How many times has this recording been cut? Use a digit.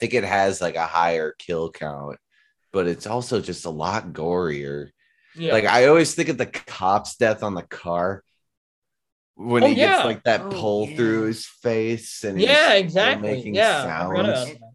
0